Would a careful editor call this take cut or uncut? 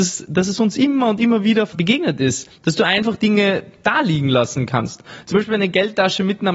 uncut